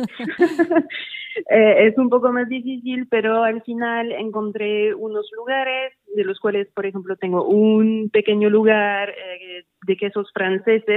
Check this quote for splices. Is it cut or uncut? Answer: uncut